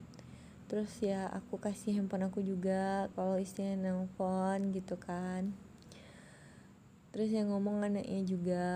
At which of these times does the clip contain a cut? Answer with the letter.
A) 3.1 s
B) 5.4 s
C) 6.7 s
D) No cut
A